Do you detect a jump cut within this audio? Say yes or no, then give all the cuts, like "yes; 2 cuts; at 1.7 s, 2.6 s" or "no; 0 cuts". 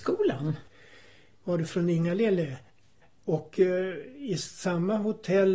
yes; 1 cut; at 1.3 s